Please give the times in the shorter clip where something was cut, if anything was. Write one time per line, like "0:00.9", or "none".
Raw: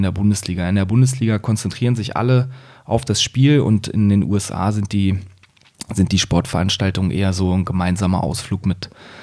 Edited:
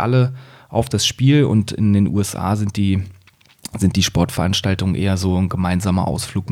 none